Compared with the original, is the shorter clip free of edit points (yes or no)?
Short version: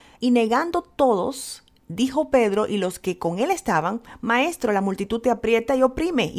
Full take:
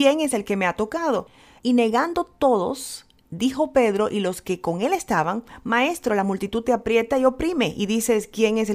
yes